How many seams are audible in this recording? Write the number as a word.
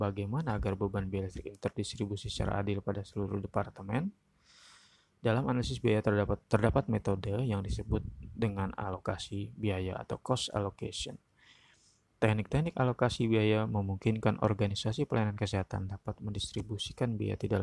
zero